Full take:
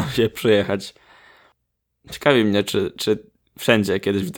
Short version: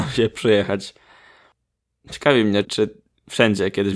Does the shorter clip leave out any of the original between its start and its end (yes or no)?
yes